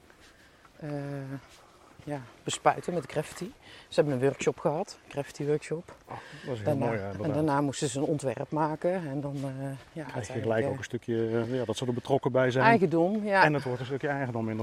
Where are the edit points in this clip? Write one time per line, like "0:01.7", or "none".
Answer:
none